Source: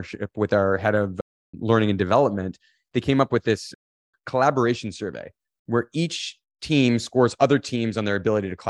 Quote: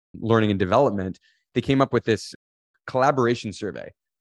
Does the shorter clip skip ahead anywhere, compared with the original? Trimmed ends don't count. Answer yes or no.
no